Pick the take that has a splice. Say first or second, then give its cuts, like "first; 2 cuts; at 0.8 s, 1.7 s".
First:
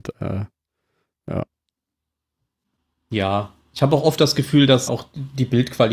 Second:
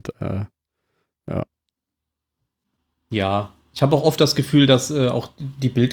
first; 1 cut; at 4.9 s